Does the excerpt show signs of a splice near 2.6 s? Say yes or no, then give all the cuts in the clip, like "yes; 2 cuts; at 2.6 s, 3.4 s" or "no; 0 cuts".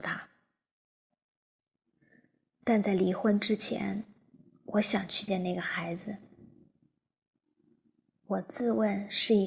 no; 1 cut; at 5.3 s